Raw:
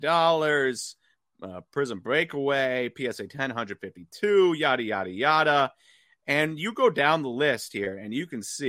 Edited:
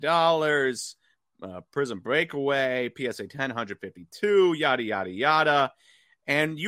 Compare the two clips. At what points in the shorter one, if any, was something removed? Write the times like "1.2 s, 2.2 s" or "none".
none